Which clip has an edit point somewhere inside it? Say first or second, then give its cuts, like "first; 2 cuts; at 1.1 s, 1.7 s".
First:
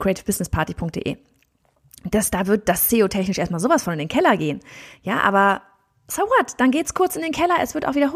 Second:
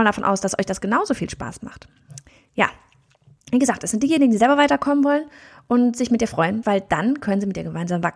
second; 1 cut; at 6.6 s